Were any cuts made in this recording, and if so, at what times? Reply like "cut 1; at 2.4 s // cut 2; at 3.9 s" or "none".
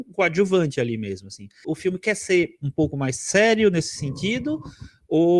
cut 1; at 1.6 s